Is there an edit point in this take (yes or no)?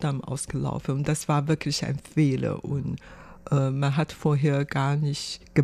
no